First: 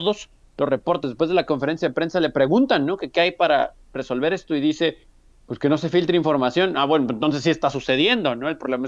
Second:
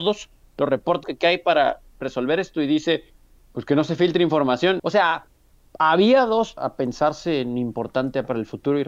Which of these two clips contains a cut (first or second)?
second